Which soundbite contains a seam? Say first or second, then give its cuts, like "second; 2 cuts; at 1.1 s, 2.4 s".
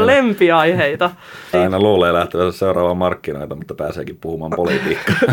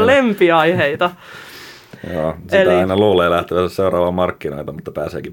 first; 1 cut; at 1.5 s